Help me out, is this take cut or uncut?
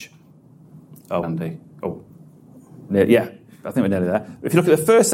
cut